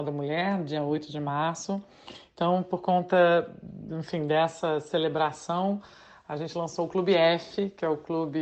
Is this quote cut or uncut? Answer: uncut